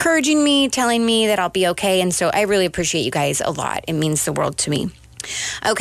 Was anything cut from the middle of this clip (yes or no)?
no